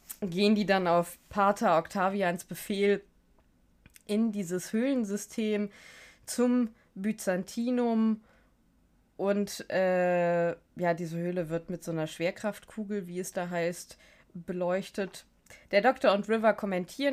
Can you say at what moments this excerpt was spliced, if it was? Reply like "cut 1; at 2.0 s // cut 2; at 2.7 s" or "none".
none